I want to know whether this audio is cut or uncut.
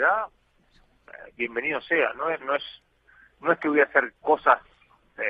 cut